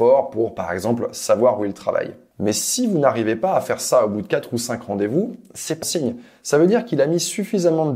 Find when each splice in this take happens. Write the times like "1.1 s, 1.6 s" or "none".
5.8 s